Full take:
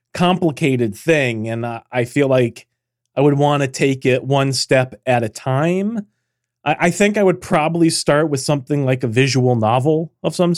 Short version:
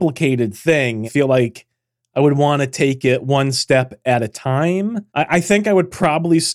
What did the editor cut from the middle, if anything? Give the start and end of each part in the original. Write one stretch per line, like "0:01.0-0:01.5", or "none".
0:01.5-0:02.1
0:06.1-0:06.6